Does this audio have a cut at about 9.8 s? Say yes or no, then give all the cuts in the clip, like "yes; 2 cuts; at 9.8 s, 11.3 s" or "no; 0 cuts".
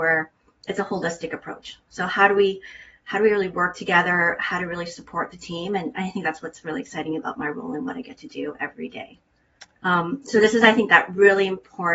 yes; 1 cut; at 9.8 s